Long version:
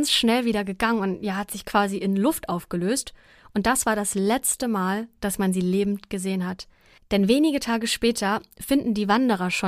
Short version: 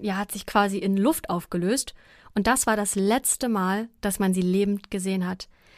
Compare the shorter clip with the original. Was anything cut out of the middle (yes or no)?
no